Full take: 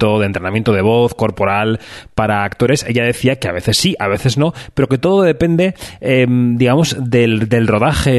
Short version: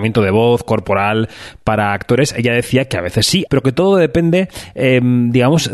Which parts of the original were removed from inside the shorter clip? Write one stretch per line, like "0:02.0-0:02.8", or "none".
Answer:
0:04.0-0:04.7